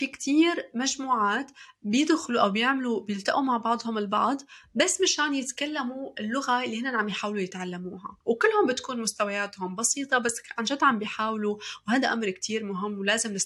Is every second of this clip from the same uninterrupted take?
no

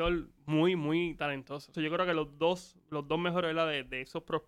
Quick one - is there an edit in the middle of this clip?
yes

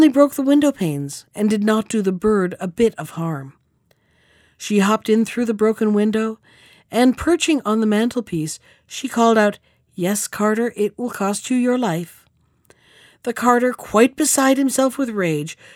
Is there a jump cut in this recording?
no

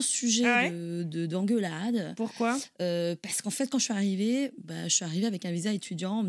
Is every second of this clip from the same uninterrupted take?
yes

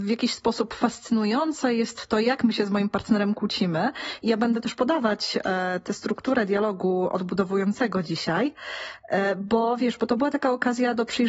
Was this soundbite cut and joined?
no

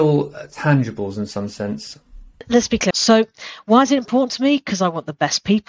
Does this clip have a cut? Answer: yes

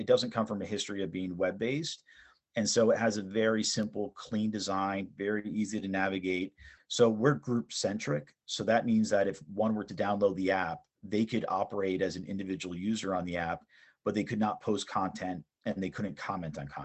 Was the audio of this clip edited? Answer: yes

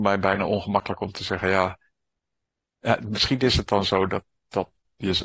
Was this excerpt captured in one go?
yes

